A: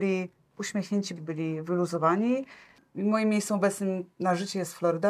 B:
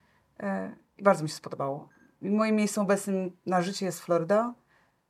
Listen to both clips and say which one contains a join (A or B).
A